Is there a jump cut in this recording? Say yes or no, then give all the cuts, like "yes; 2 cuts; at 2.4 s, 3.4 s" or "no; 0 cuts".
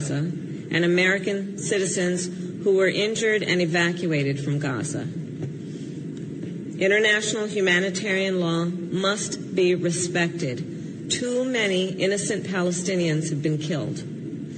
yes; 1 cut; at 6.4 s